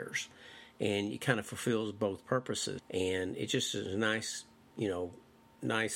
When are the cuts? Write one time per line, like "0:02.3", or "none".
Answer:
0:02.8
0:04.7